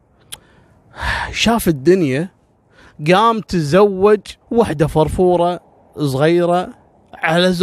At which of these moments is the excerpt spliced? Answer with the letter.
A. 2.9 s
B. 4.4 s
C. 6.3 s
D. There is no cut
B